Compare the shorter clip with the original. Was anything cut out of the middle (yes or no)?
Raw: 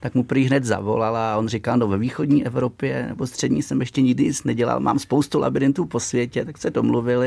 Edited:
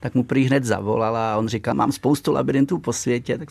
yes